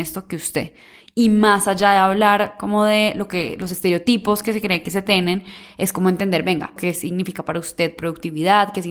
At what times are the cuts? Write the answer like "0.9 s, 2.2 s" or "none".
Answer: 1.0 s, 6.8 s

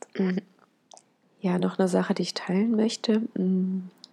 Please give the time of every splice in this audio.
none

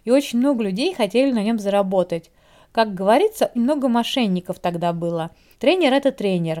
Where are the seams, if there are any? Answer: 3.6 s, 5.5 s

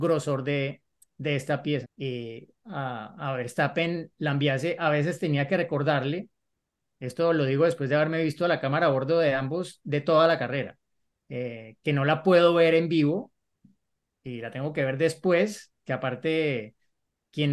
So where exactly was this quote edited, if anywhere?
1.8 s

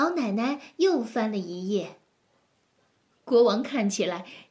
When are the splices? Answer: 3.1 s

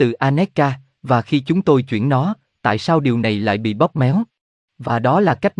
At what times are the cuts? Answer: 4.6 s

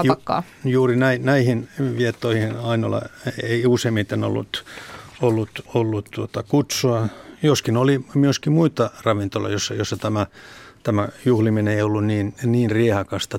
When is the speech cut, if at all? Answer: 5.7 s

